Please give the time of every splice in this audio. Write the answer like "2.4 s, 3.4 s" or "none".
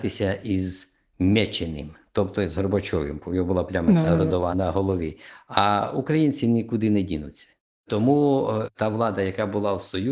none

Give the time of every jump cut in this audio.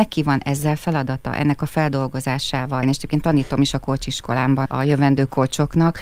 2.8 s, 4.7 s

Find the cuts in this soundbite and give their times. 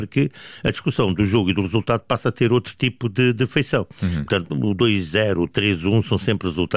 none

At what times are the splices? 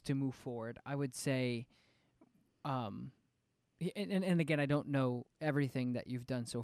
none

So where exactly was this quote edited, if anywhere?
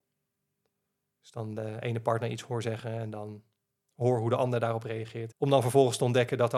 5.3 s

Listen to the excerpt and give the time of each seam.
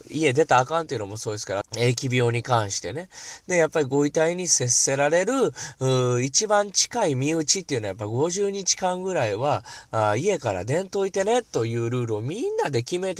1.6 s

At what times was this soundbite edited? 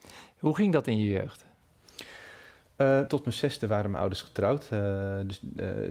3.1 s

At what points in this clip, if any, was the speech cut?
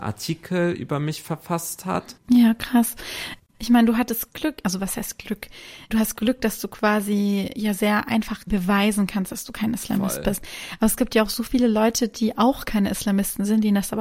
none

